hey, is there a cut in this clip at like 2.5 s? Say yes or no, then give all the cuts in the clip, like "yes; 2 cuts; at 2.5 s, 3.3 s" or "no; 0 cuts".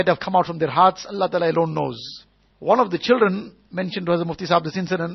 yes; 2 cuts; at 2.5 s, 3.6 s